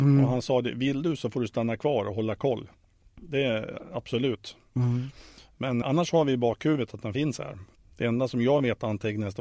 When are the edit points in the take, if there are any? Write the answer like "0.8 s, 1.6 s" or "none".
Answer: 5.8 s, 7.8 s